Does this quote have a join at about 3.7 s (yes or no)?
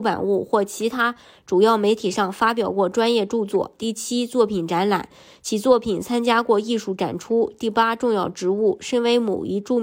no